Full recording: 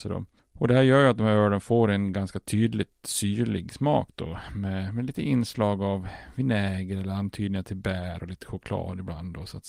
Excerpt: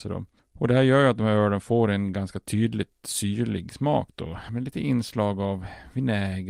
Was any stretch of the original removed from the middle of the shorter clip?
yes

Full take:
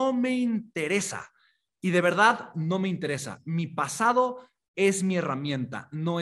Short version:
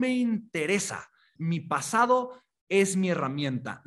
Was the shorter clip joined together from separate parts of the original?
yes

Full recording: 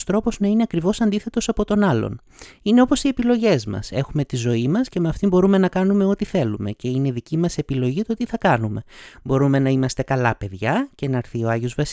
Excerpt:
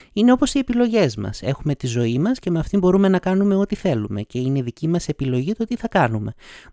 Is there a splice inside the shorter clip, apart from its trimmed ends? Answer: no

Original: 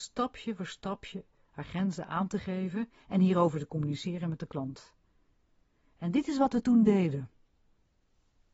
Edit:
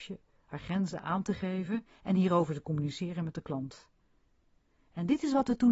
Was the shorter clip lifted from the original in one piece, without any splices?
yes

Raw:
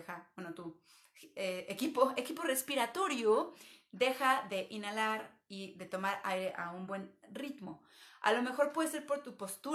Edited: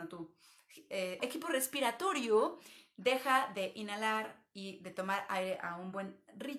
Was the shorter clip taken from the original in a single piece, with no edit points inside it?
no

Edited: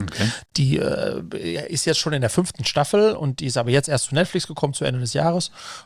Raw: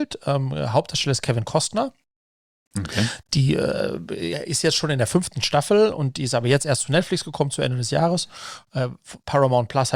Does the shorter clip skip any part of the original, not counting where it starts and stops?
no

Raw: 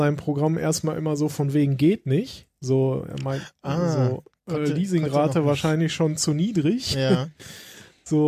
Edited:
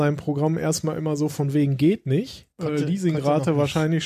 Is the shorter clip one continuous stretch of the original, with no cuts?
no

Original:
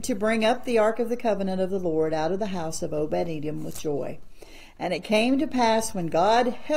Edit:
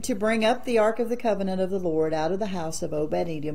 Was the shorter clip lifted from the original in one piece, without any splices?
yes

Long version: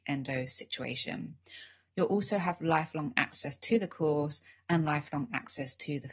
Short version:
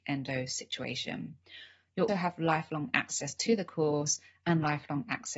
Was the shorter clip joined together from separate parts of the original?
yes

